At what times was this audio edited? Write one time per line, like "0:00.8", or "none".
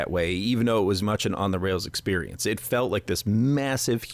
0:01.0